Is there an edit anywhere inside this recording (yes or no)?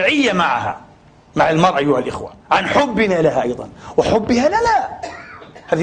yes